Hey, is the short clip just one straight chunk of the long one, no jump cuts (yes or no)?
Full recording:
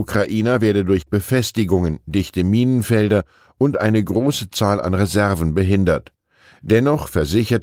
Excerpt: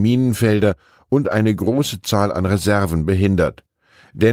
yes